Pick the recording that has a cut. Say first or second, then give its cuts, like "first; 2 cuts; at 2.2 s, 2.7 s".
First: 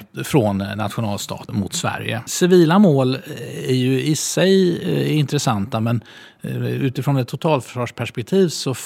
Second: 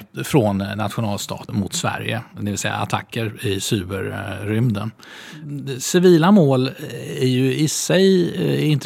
first; 1 cut; at 2.3 s